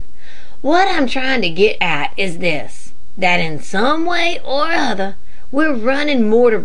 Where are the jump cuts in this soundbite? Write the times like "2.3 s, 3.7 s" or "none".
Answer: none